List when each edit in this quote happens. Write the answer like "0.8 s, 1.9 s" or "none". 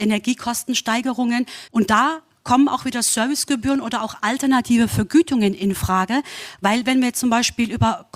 1.7 s